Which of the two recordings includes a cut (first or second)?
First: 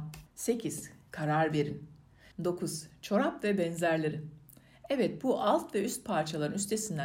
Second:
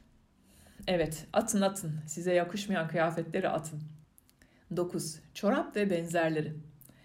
first